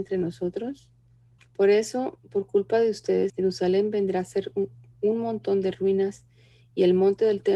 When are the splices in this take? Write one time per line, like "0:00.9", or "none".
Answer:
0:01.4
0:03.3